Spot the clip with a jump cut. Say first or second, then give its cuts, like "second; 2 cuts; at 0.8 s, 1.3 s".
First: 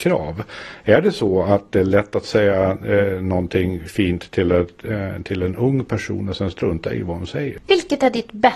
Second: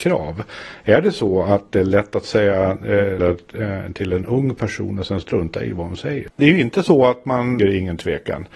second; 3 cuts; at 3.2 s, 6.3 s, 7.6 s